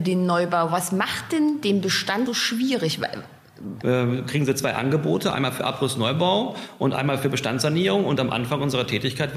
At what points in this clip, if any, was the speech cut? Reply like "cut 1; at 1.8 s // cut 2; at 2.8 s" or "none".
cut 1; at 2.3 s // cut 2; at 3.8 s